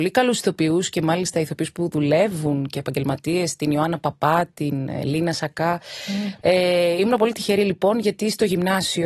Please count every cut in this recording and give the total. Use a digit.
1